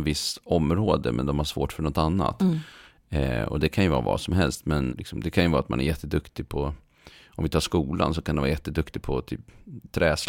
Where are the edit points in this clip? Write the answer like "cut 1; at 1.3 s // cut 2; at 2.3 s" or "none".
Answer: cut 1; at 4.9 s

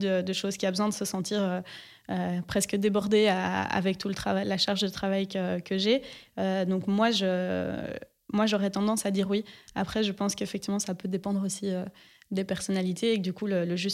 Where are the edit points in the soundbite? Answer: cut 1; at 6.3 s

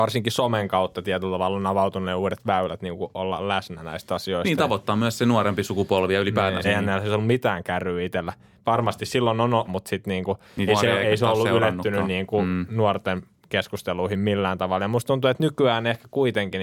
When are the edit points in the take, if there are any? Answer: cut 1; at 6.6 s // cut 2; at 9.7 s // cut 3; at 10.7 s

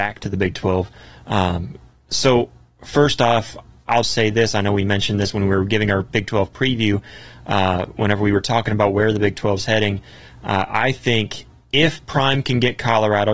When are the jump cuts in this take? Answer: cut 1; at 4.0 s

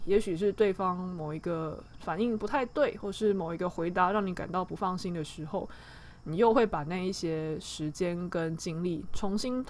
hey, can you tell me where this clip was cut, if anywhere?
none

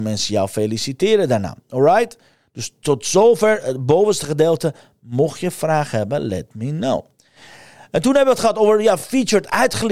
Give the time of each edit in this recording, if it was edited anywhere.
none

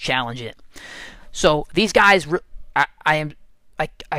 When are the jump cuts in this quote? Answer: none

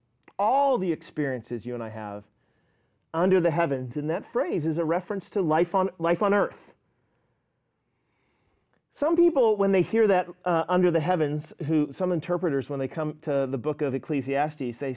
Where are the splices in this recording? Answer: none

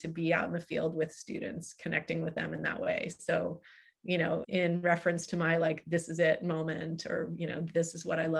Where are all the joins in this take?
cut 1; at 4.4 s

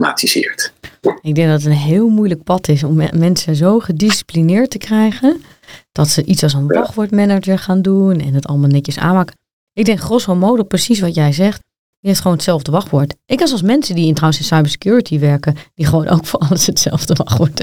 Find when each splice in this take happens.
none

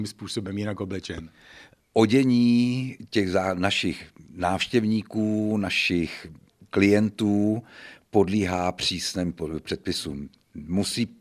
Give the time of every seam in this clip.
none

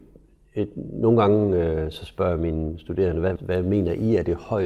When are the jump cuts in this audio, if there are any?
cut 1; at 3.4 s

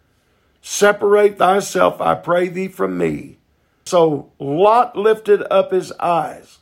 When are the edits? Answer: cut 1; at 3.9 s

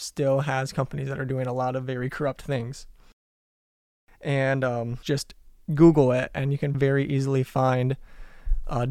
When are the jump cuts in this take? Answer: cut 1; at 5.0 s // cut 2; at 6.7 s

